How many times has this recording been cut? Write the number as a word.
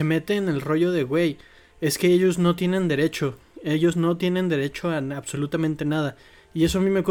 zero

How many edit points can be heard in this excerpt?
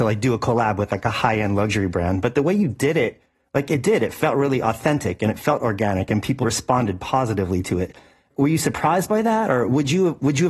one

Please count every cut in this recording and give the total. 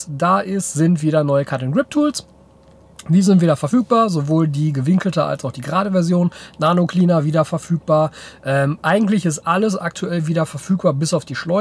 zero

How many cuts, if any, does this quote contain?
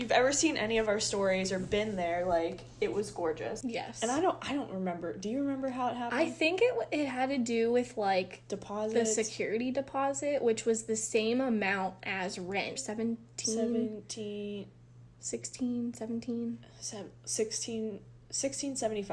two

